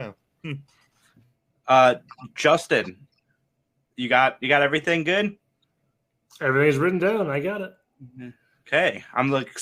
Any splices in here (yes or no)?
no